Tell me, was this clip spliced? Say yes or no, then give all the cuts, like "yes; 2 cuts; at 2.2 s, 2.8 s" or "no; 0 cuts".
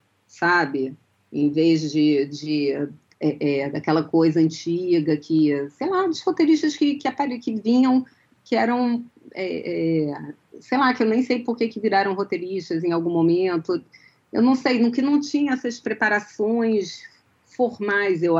no; 0 cuts